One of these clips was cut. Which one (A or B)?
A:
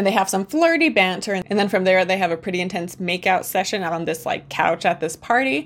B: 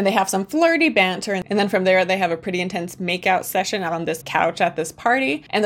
B